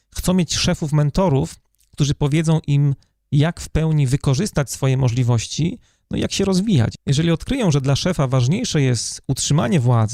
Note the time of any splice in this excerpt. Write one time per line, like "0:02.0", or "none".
none

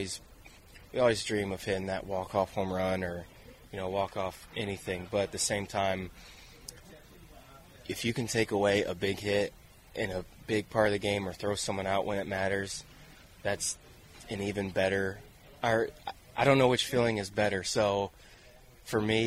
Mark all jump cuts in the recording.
none

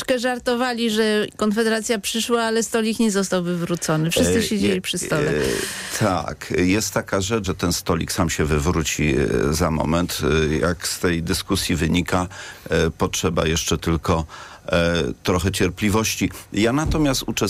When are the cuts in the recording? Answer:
0:07.4

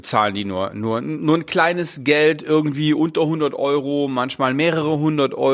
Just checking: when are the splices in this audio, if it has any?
none

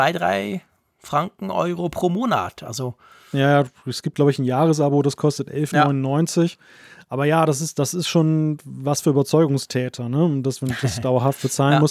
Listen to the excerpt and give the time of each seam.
none

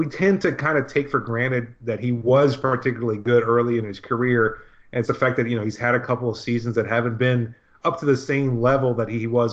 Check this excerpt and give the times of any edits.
0:05.1

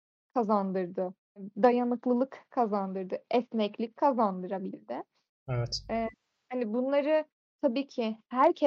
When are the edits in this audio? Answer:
none

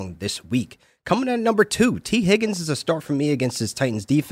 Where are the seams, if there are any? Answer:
none

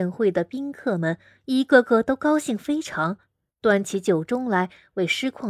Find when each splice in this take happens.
0:03.5

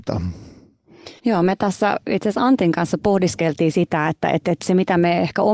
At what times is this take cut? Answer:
0:01.2

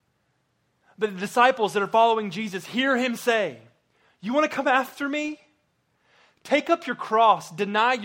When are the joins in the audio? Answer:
none

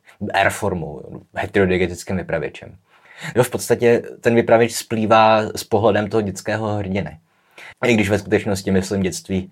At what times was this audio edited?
0:03.3
0:07.7

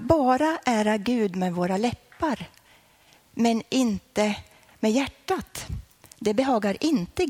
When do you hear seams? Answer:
none

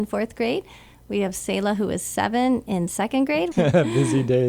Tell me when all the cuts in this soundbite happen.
0:03.5

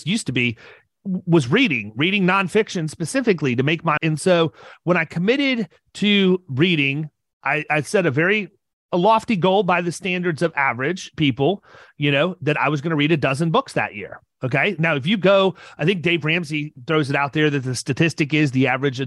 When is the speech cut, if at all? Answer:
0:04.0

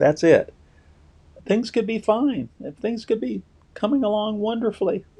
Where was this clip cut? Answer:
0:01.4

